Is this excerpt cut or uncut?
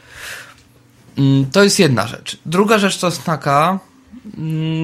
uncut